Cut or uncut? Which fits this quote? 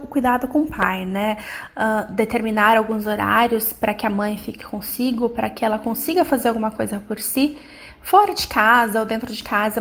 uncut